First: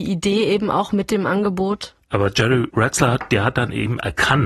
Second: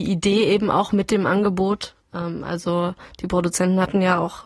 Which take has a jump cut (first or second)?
first